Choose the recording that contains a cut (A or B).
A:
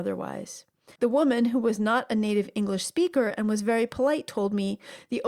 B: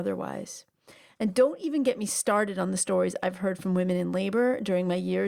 A